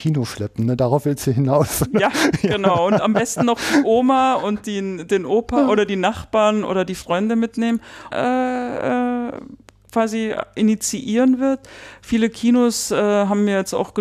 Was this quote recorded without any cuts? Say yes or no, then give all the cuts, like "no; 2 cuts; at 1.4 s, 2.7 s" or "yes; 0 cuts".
no; 1 cut; at 8.1 s